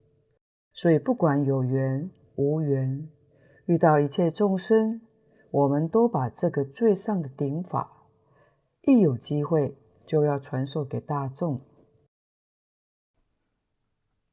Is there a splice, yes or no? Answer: no